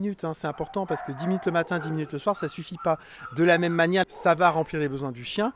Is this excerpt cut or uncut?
cut